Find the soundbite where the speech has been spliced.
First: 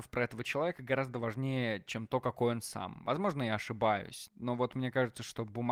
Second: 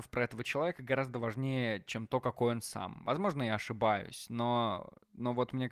first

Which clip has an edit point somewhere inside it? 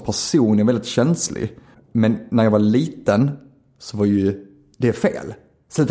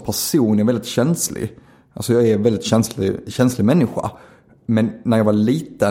first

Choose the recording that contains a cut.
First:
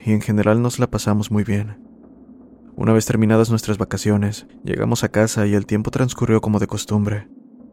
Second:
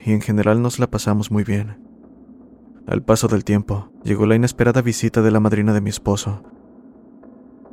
second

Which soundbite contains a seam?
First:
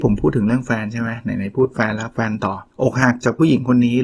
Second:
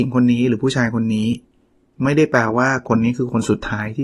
first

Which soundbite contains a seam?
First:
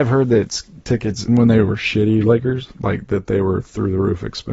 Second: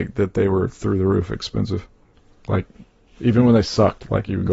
first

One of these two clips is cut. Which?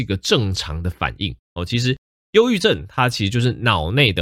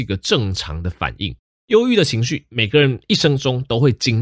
first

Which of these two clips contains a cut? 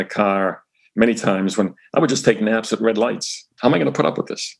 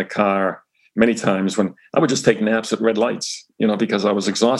first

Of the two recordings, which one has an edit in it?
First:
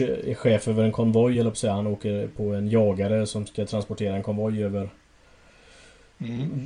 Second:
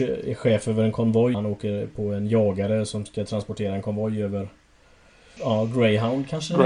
second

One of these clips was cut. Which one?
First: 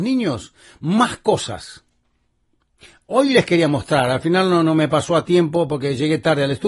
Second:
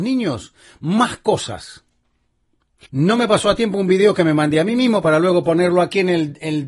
second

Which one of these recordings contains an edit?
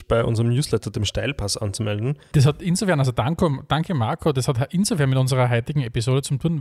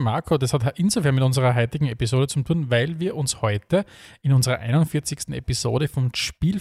first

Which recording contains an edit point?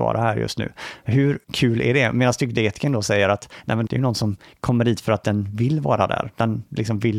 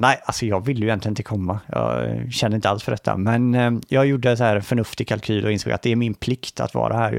first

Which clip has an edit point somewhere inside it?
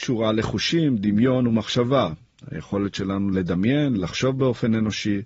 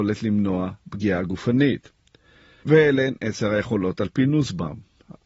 second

